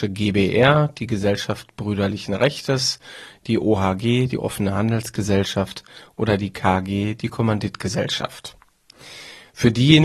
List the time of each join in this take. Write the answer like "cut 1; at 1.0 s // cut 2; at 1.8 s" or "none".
none